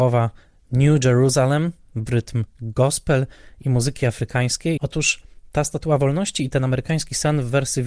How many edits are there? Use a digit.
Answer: 1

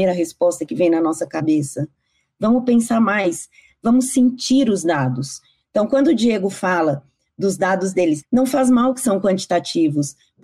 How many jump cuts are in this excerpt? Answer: 1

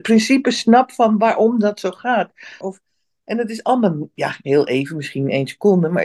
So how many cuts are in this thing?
1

